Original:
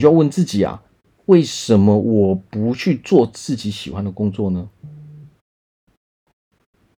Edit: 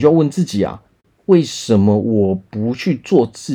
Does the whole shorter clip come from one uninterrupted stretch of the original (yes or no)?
yes